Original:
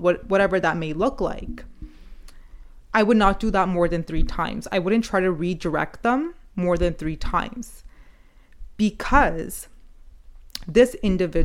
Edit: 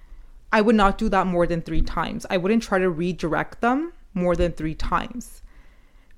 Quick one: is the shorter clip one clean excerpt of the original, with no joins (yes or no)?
yes